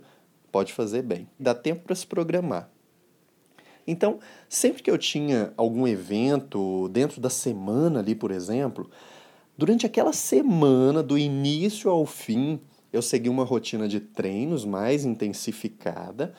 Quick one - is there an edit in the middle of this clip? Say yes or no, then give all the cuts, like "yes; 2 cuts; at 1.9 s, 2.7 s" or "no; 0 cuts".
yes; 1 cut; at 1.4 s